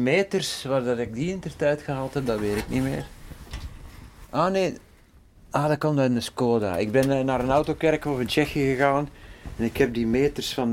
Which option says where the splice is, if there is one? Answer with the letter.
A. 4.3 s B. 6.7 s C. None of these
C